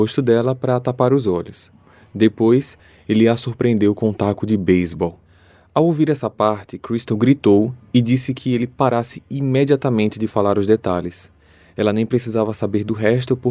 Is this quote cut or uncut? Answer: uncut